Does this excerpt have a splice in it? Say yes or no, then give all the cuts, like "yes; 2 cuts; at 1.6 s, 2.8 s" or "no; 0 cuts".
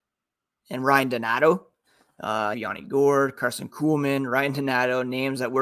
yes; 1 cut; at 2.5 s